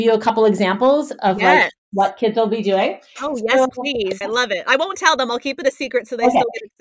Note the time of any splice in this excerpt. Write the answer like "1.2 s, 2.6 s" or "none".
4.2 s

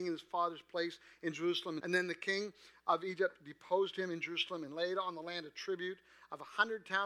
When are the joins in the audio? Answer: 1.8 s

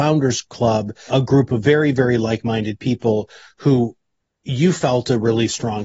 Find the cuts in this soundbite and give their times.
1.1 s

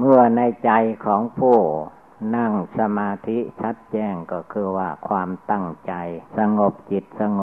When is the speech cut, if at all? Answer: 6.3 s

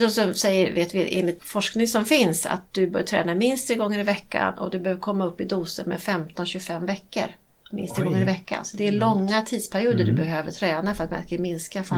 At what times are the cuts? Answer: 1.4 s

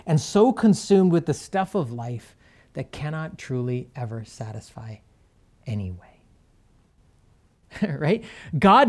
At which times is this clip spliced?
none

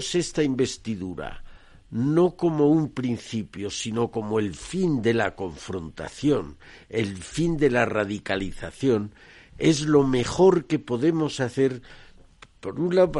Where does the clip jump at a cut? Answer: none

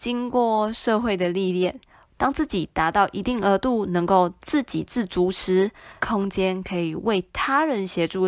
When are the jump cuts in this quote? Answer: 2.1 s, 6.0 s

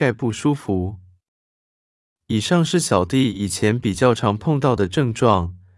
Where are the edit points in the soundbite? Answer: 4.1 s

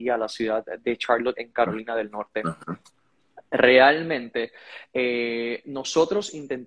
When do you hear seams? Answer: none

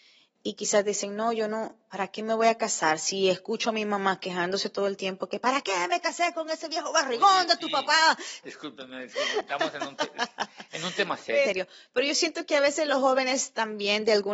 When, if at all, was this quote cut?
8.4 s, 11.4 s

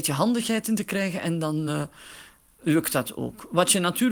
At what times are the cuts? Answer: none

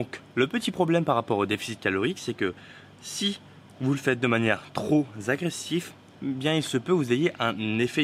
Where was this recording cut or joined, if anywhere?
3.7 s

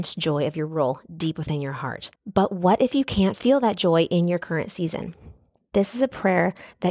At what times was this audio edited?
2.2 s, 5.6 s

